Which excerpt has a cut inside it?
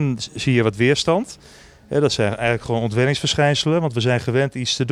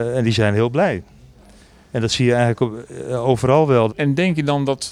second; 1 cut; at 3.9 s

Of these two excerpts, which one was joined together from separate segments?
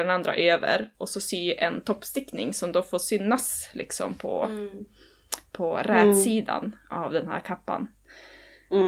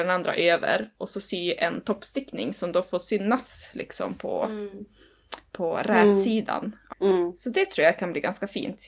second; 1 cut; at 6.9 s

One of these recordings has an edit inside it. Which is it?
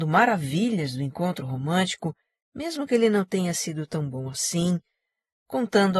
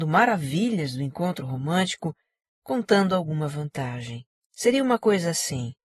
second; 2 cuts; at 2.4 s, 4.5 s

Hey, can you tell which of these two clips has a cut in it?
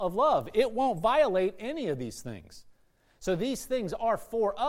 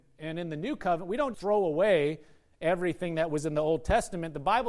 second; 1 cut; at 1.3 s

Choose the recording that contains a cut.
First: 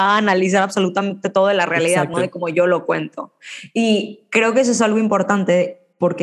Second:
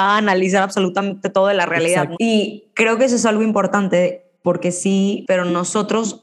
second; 2 cuts; at 2.1 s, 5.2 s

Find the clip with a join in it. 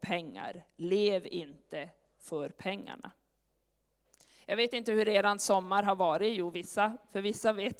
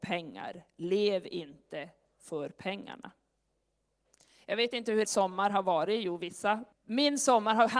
second; 2 cuts; at 5.0 s, 6.7 s

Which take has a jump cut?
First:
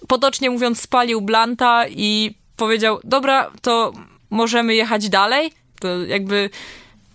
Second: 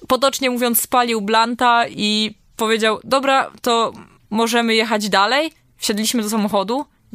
first; 1 cut; at 5.7 s

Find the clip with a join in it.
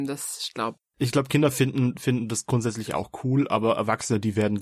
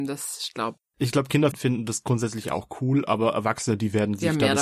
second; 1 cut; at 1.5 s

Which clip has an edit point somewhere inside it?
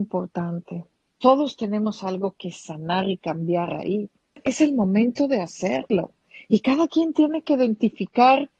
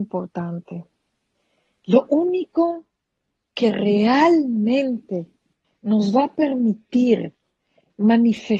first; 1 cut; at 1.1 s

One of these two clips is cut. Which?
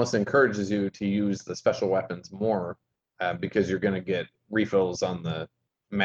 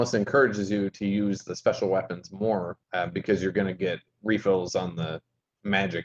second; 1 cut; at 2.8 s

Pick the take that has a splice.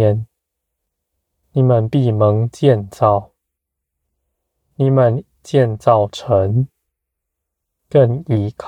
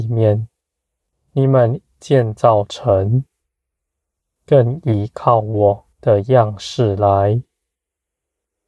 second; 2 cuts; at 1.1 s, 5.9 s

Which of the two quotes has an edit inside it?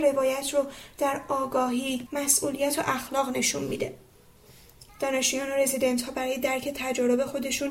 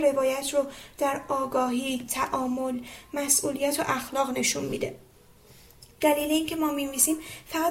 first; 2 cuts; at 2.1 s, 4.9 s

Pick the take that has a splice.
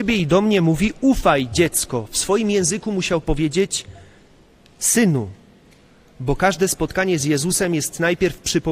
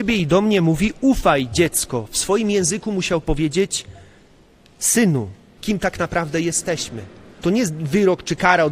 second; 2 cuts; at 5.6 s, 7.4 s

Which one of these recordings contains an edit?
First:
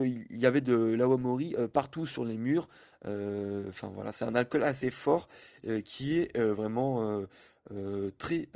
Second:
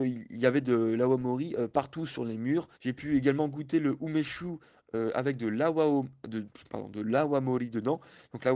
second; 1 cut; at 2.8 s

